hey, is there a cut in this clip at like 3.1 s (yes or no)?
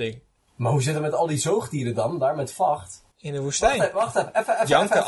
yes